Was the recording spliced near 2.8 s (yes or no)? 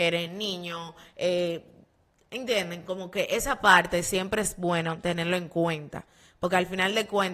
no